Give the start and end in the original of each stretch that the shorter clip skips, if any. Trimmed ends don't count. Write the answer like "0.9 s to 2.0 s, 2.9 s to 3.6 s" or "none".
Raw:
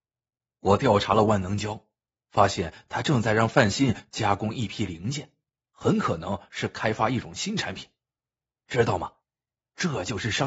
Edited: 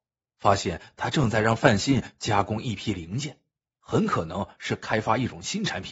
none